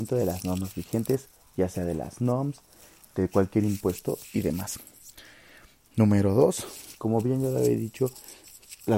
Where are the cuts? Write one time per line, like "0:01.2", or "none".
0:06.9